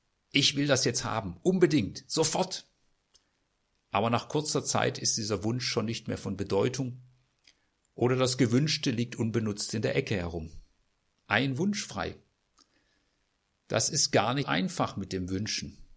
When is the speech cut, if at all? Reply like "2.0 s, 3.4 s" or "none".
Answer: 11.2 s, 14.4 s